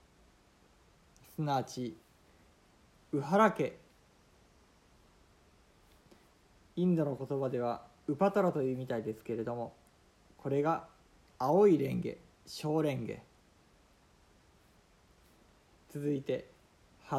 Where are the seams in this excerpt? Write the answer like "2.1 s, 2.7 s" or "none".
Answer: none